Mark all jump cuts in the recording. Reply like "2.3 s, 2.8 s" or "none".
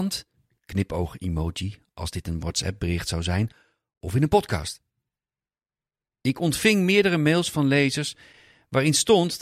none